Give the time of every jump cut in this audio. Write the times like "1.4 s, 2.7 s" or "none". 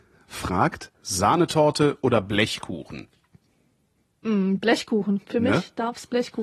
0.9 s